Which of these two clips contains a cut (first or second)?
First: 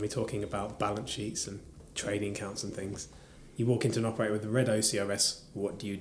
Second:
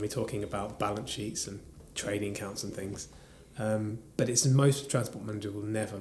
first